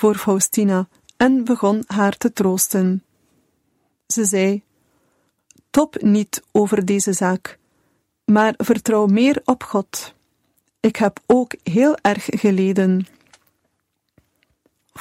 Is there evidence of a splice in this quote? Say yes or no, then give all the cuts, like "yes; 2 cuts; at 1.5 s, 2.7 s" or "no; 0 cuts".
no; 0 cuts